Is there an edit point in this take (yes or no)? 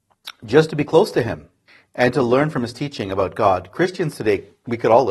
no